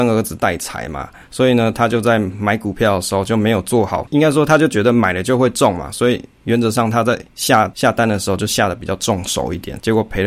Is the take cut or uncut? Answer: uncut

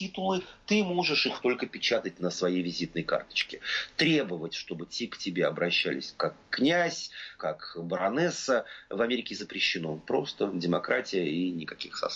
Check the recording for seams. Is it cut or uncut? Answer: cut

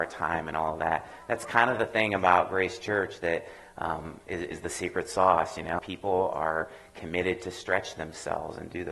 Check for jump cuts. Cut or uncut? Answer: cut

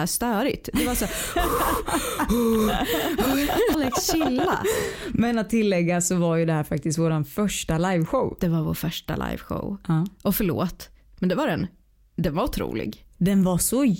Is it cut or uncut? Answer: cut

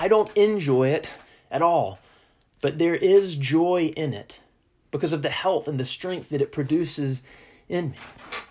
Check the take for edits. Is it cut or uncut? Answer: uncut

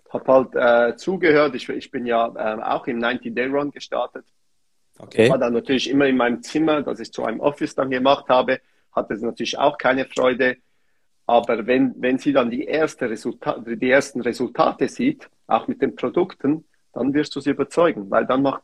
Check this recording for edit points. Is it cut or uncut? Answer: uncut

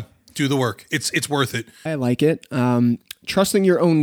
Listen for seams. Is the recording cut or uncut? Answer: cut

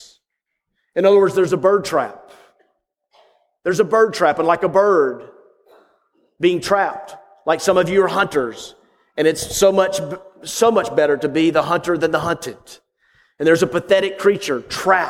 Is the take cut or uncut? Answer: uncut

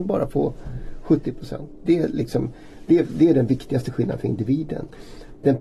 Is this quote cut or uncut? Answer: uncut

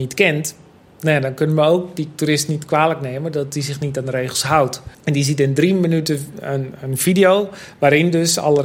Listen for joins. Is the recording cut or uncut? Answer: cut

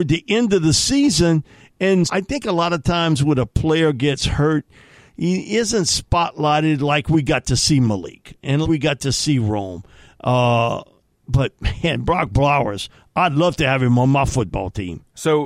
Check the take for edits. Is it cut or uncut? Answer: cut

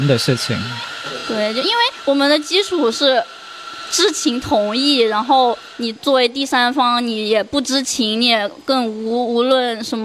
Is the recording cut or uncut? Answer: uncut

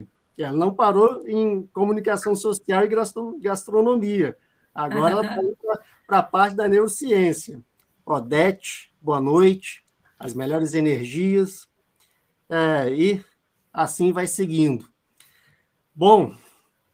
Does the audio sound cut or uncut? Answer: cut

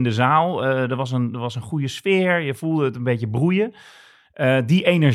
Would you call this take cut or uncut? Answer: uncut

